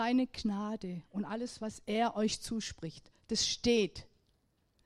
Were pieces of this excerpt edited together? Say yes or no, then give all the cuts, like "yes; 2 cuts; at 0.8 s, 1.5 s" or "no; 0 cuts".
no; 0 cuts